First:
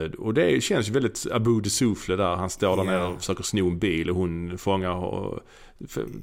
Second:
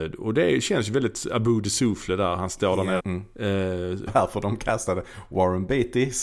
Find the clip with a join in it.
second; 2 cuts; at 3.0 s, 4.1 s

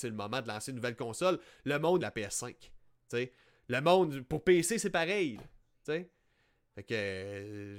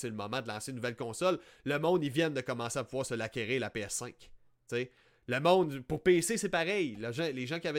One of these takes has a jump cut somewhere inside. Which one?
first; 2 cuts; at 2.0 s, 5.4 s

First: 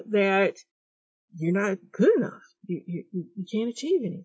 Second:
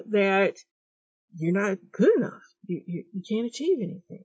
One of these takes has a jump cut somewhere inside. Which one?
second; 1 cut; at 3.1 s

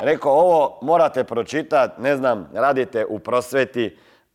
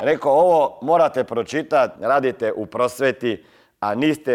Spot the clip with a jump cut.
second; 1 cut; at 2.0 s

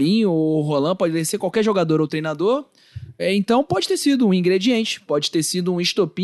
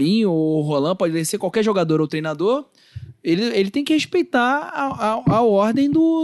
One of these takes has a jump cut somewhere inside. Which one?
first; 1 cut; at 3.2 s

